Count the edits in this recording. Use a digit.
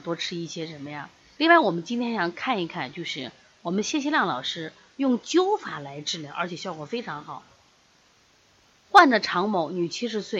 1